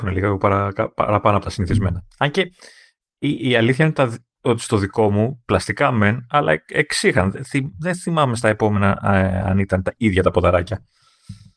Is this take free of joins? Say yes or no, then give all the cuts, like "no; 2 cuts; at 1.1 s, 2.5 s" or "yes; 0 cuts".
yes; 0 cuts